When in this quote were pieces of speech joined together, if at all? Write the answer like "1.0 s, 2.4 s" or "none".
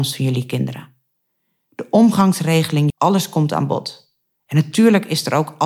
2.9 s